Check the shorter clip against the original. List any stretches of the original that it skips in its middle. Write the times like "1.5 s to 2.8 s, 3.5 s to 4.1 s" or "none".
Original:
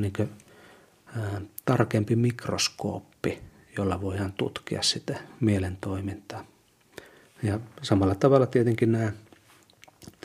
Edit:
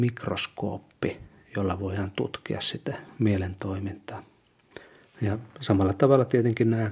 none